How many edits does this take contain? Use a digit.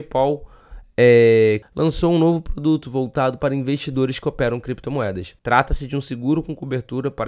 2